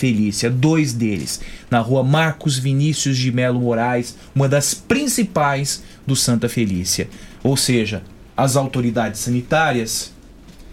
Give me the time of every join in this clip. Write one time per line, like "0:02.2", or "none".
0:08.3